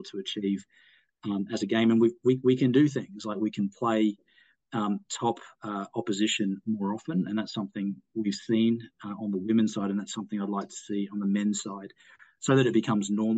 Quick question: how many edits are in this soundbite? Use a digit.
0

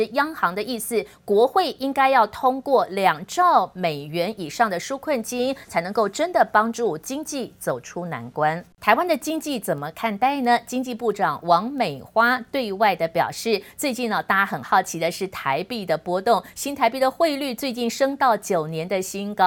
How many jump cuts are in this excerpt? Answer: 1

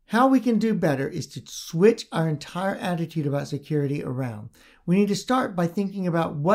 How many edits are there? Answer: 0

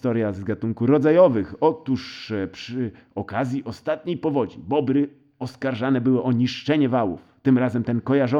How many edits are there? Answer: 0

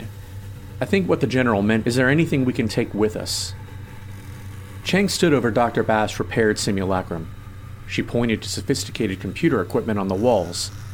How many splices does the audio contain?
1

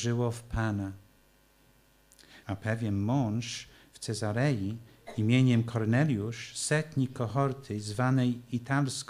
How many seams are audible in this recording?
1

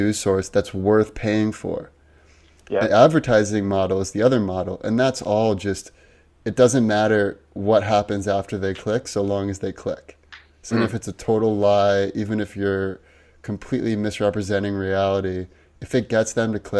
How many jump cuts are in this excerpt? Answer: 2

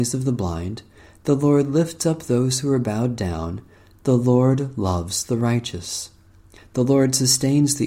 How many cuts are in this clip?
1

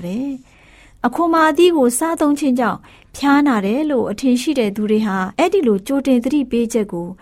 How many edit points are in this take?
1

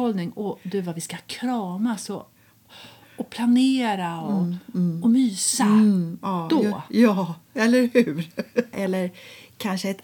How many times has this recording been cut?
1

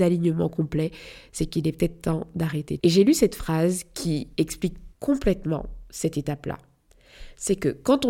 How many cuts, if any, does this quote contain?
2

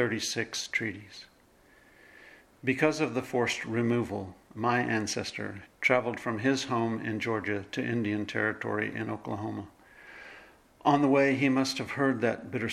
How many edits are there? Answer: 1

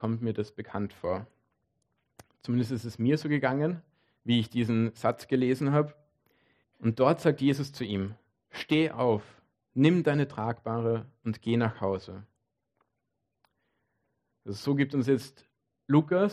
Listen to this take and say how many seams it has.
1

